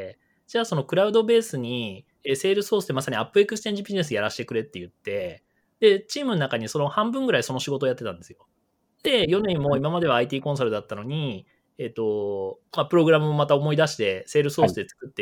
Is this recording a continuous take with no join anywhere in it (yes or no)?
yes